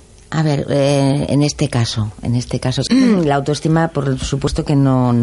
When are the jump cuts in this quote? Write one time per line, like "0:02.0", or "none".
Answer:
0:02.9